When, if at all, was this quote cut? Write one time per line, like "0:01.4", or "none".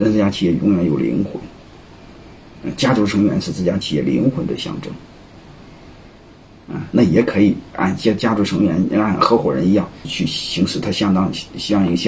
0:06.9
0:10.0